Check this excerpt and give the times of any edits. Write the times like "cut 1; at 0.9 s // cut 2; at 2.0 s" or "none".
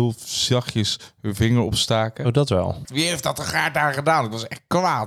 cut 1; at 2.8 s